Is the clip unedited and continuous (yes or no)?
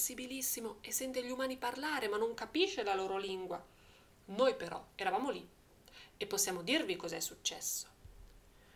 yes